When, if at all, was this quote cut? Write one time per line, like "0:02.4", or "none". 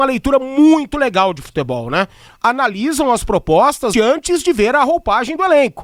0:02.3
0:03.9

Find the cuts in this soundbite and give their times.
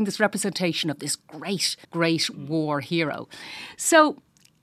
0:01.8

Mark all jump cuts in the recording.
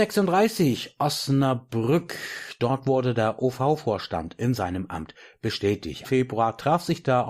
0:06.0

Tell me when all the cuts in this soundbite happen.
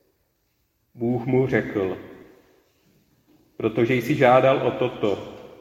none

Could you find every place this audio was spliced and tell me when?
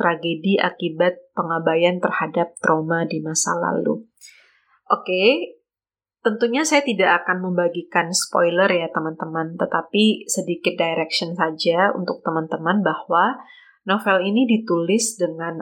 none

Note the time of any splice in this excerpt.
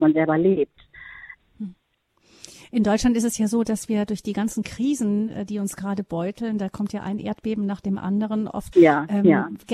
0:08.7

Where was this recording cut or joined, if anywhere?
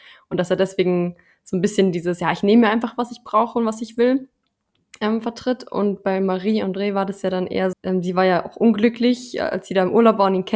0:07.7

